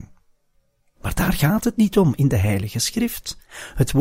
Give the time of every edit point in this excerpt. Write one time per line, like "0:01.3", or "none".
none